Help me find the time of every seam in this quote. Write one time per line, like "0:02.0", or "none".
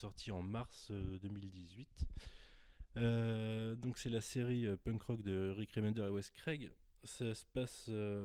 none